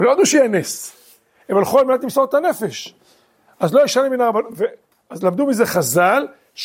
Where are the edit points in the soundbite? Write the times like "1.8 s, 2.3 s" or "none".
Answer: none